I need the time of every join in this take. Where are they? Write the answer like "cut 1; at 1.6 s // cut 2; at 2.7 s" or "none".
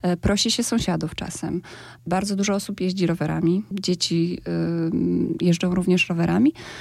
none